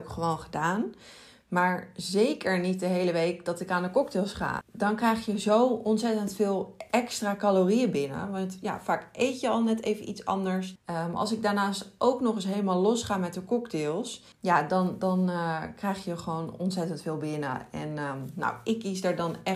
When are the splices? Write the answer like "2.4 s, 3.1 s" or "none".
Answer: 4.6 s, 10.8 s, 14.3 s